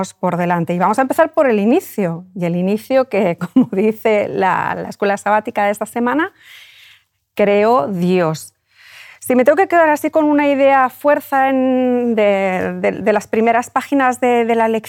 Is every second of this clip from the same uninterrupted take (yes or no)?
yes